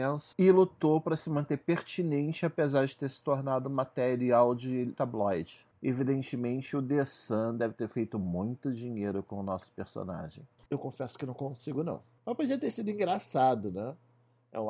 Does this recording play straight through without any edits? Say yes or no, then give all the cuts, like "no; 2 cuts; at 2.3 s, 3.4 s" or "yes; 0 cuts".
no; 1 cut; at 10.7 s